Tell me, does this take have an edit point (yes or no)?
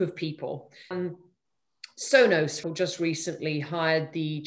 yes